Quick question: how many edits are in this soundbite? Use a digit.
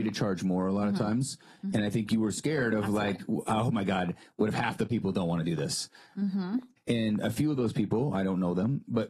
1